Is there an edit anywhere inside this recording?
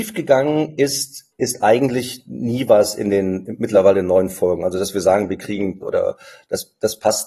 yes; 2 cuts; at 1.3 s, 5.8 s

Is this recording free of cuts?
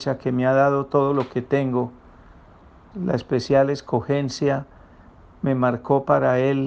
no; 1 cut; at 2.9 s

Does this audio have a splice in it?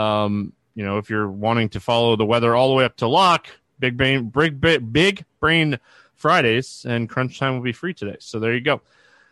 no; 0 cuts

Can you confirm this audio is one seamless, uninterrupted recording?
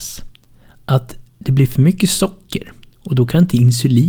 yes; 0 cuts

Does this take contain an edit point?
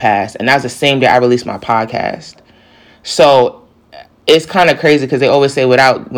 no; 0 cuts

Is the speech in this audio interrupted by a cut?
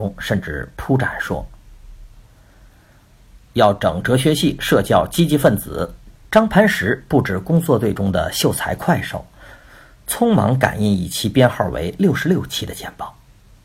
yes; 2 cuts; at 3.4 s, 6.2 s

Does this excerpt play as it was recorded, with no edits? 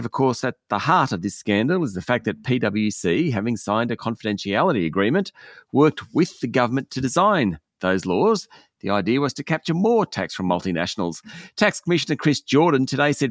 yes; 0 cuts

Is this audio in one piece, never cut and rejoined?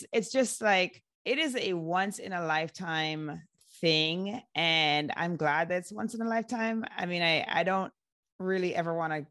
no; 1 cut; at 1.1 s

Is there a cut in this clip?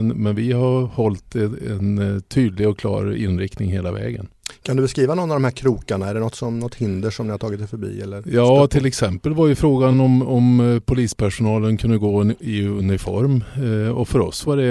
no; 0 cuts

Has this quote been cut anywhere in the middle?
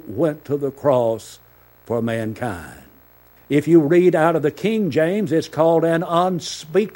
yes; 1 cut; at 3.4 s

